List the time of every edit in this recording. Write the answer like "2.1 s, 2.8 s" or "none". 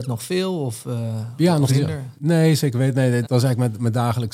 1.7 s, 3.2 s